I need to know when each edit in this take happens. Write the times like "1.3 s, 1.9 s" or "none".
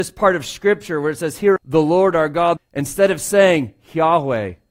1.6 s, 2.6 s